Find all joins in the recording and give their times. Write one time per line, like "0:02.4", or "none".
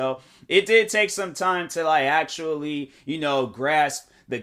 none